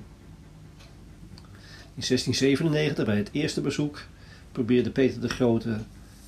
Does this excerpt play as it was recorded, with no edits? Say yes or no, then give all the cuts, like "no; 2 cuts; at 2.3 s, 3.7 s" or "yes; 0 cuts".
yes; 0 cuts